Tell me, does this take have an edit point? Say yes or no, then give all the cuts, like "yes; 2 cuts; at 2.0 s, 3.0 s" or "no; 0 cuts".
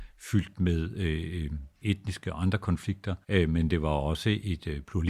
yes; 2 cuts; at 1.8 s, 3.2 s